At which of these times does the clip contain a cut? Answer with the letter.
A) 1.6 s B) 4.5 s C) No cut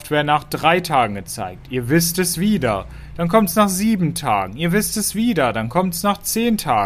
C